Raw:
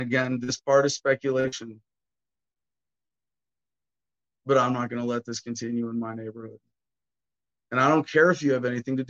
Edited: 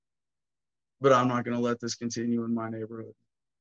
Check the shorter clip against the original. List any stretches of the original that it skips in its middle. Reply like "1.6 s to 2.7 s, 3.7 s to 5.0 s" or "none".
none